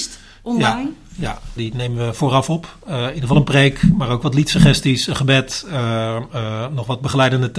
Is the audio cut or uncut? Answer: cut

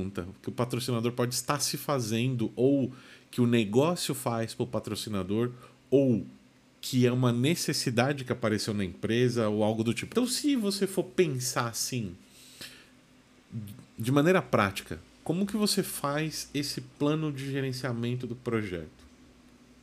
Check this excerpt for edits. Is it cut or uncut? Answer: cut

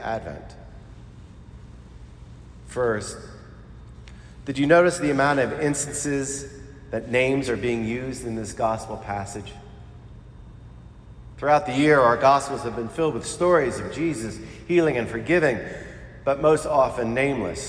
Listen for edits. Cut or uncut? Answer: uncut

